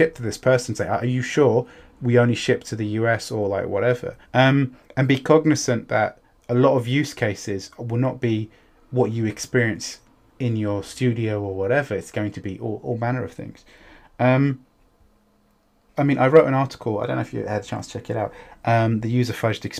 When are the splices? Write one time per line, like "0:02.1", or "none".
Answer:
0:04.2
0:16.0